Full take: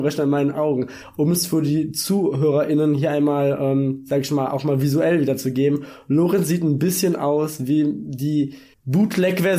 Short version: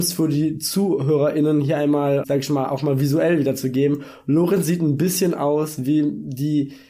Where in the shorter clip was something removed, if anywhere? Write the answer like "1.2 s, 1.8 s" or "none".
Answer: 2.2 s